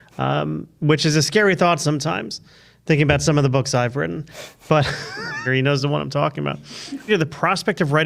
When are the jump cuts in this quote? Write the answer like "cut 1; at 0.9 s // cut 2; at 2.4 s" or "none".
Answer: cut 1; at 5.5 s // cut 2; at 7.1 s